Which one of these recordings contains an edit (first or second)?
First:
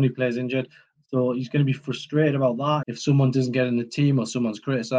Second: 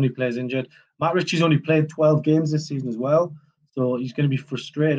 first